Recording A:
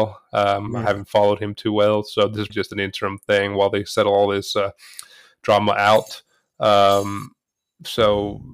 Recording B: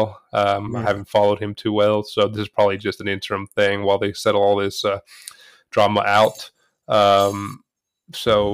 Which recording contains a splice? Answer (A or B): A